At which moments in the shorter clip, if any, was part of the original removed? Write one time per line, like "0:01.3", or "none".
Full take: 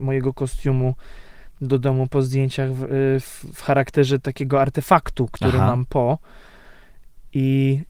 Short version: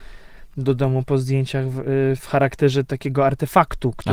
0:02.2